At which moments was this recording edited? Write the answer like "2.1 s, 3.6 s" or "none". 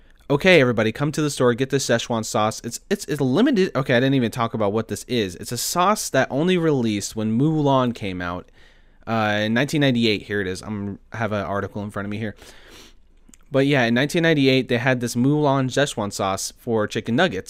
none